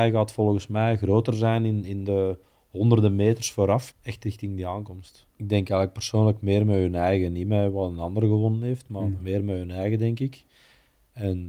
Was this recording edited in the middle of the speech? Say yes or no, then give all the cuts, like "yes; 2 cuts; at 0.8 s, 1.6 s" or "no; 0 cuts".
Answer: yes; 2 cuts; at 3.9 s, 5.3 s